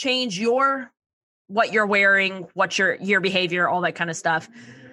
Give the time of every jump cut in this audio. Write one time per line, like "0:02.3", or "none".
none